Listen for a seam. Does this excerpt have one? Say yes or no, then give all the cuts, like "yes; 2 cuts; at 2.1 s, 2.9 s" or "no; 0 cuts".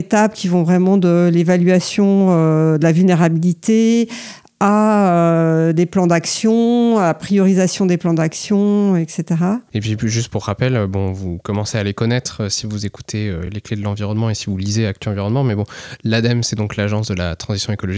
no; 0 cuts